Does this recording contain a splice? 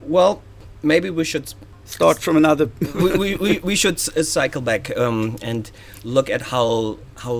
no; 0 cuts

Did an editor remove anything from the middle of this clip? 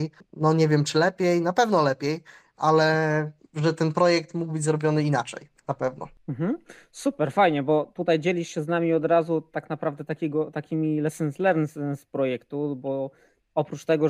no; 0 cuts

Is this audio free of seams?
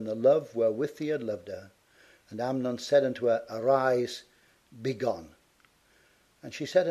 yes; 0 cuts

